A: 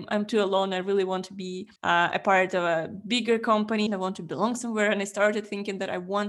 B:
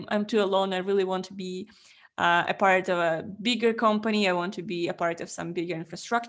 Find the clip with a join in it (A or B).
A